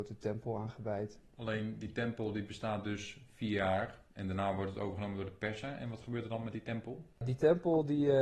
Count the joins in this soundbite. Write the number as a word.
zero